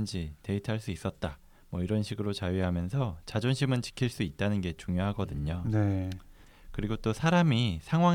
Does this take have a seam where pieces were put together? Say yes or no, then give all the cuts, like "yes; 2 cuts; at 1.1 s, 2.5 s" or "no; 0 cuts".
no; 0 cuts